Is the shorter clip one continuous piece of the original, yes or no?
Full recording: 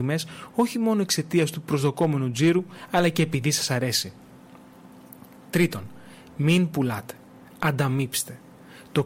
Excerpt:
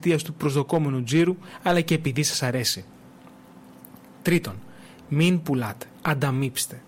no